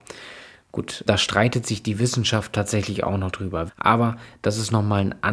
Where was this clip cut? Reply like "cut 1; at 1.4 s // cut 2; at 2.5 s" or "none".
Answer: cut 1; at 1.1 s // cut 2; at 3.7 s